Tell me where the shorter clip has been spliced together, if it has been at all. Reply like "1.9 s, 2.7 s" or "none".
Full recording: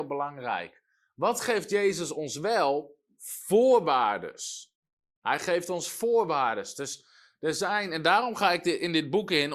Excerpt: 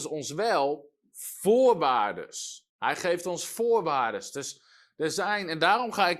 2.7 s